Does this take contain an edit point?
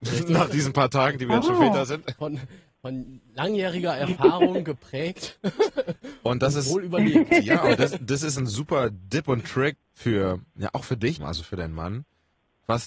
yes; 2 cuts; at 9.7 s, 11.2 s

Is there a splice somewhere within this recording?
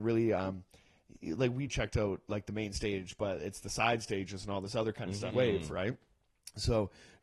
yes; 2 cuts; at 1.7 s, 5.3 s

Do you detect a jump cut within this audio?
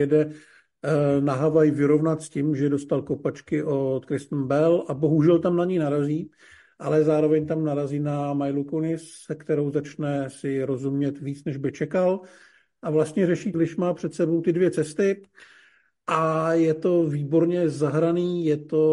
yes; 1 cut; at 13.5 s

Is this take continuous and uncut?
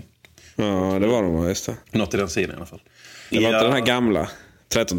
no; 2 cuts; at 1.8 s, 3.3 s

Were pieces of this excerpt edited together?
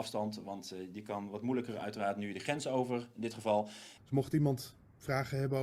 yes; 1 cut; at 4.0 s

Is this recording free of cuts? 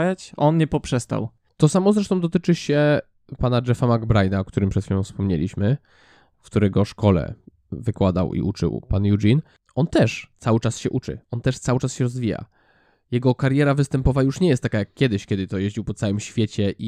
yes; 0 cuts

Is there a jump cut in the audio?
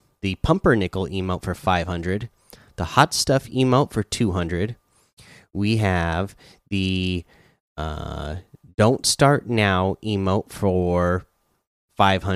no; 0 cuts

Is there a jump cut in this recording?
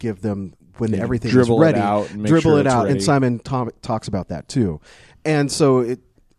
no; 0 cuts

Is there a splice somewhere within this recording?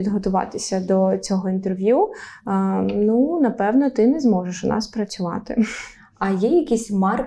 no; 0 cuts

